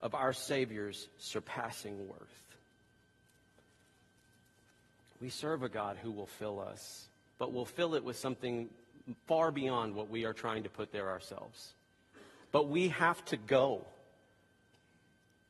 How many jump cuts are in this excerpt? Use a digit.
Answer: 1